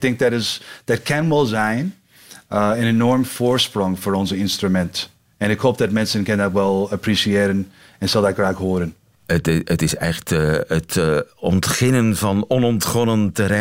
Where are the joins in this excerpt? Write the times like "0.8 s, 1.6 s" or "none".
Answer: none

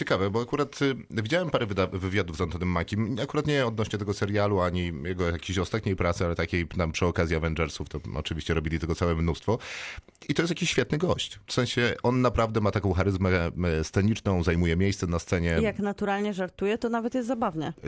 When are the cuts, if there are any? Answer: none

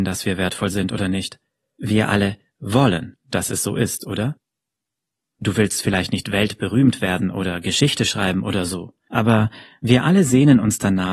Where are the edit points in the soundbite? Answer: none

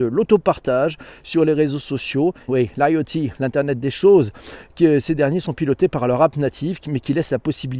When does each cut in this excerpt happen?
2.5 s

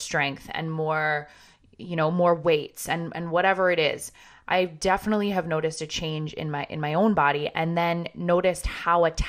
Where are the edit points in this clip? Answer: none

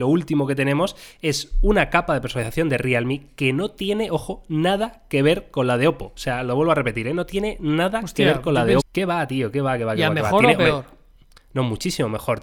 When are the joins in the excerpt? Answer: 8.8 s

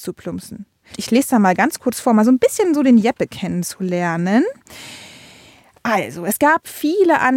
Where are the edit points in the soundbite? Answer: 0.9 s

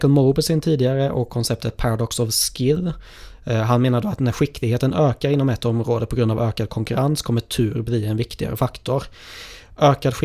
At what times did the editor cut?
none

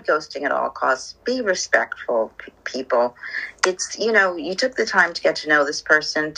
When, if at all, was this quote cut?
none

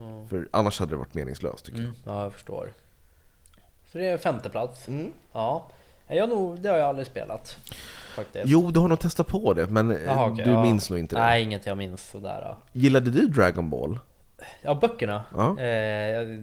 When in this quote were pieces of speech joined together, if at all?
none

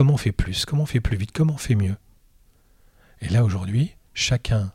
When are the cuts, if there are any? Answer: none

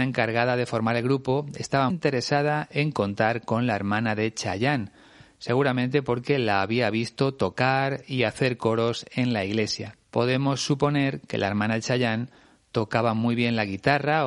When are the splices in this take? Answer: 1.9 s, 10.0 s

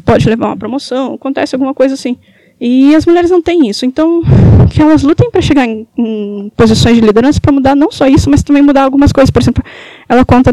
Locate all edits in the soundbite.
none

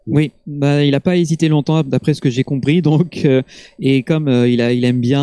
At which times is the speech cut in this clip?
none

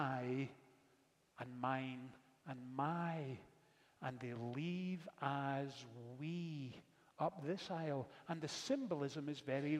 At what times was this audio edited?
none

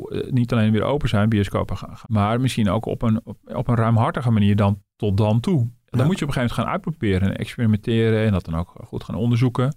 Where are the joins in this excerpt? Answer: 2.0 s

